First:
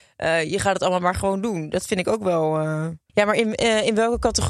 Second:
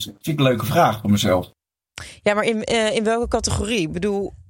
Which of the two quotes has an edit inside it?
first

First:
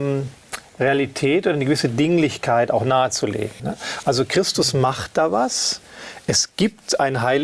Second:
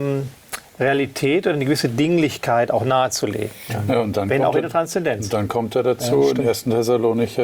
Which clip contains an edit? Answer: first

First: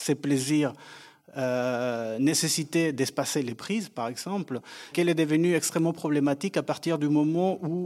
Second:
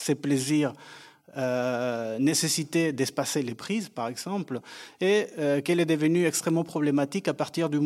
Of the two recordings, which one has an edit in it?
first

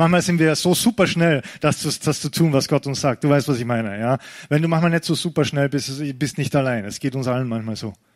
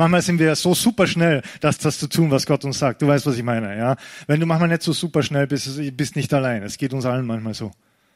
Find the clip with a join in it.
second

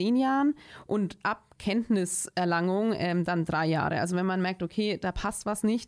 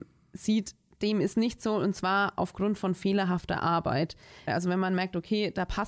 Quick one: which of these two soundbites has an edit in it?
second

